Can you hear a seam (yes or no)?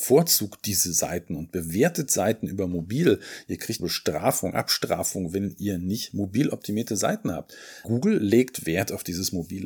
yes